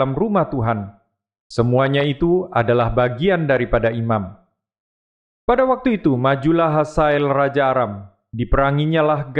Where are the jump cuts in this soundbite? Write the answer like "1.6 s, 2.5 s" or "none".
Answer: none